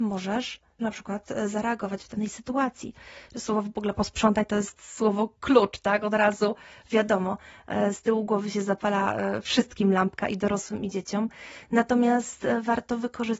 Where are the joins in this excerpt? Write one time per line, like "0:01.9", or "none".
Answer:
0:03.3